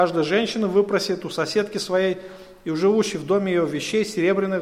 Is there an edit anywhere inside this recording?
no; 0 cuts

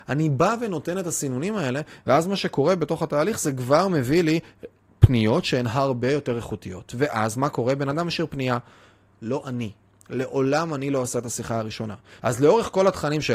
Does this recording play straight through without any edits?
no; 2 cuts; at 9.1 s, 12.2 s

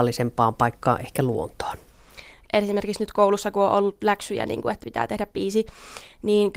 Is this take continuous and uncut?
no; 1 cut; at 2.5 s

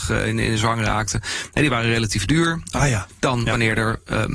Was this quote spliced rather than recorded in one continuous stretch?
yes; 1 cut; at 2.7 s

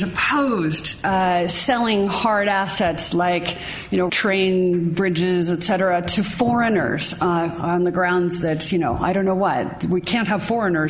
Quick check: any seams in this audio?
yes; 1 cut; at 4.1 s

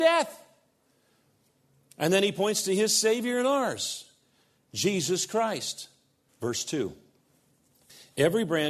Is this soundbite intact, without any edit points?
no; 1 cut; at 6.3 s

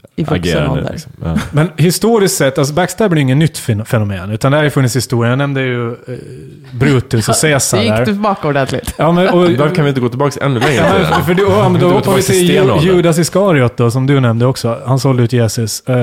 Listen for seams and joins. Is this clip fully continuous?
yes; 0 cuts

